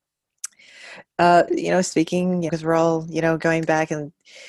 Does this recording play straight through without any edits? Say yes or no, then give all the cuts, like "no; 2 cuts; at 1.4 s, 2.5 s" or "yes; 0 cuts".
no; 2 cuts; at 1.5 s, 2.5 s